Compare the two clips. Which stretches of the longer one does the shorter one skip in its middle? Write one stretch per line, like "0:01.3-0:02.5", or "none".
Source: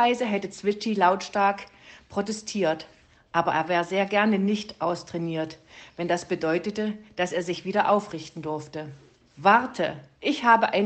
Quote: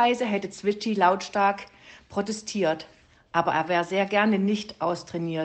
none